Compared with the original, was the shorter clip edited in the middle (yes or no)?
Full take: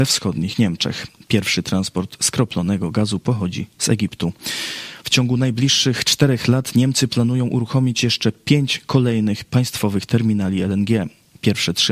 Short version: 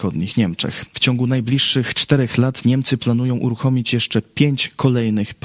yes